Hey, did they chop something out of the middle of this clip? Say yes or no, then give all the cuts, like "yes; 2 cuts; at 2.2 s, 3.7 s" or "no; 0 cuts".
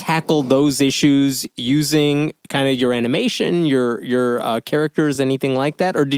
no; 0 cuts